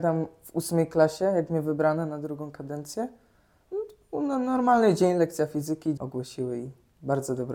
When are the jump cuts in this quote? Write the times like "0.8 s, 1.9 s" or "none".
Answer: 6.0 s